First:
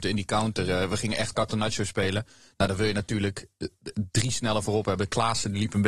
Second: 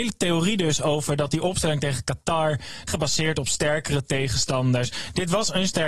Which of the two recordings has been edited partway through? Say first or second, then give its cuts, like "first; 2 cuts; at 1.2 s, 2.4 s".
second; 1 cut; at 2.9 s